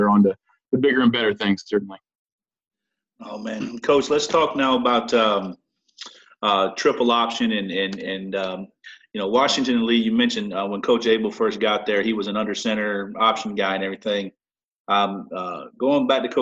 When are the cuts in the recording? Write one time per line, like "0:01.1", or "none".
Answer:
0:03.6